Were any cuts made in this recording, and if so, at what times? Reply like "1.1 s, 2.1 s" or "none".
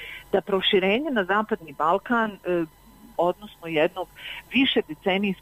3.2 s